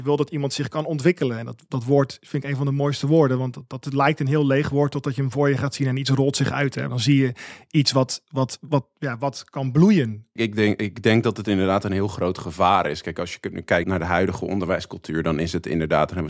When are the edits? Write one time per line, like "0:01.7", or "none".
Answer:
0:06.9
0:10.4
0:13.8